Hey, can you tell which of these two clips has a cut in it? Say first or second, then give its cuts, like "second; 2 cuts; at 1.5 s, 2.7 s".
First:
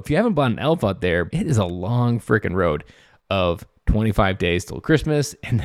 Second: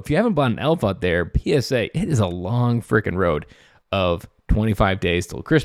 first; 1 cut; at 1.3 s